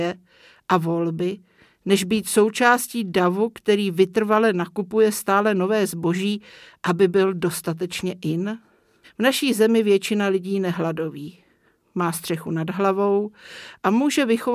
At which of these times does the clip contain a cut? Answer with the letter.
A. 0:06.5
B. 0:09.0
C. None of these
B